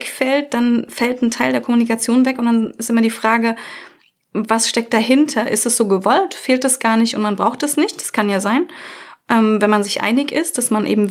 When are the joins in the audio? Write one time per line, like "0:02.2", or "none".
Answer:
none